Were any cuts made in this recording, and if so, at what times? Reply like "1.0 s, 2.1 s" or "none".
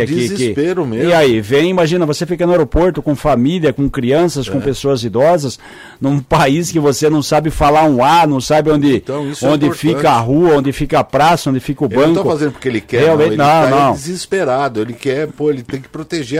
none